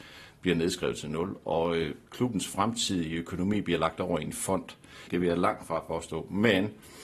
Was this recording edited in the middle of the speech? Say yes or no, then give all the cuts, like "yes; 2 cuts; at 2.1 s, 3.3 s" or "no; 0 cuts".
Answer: yes; 1 cut; at 5.1 s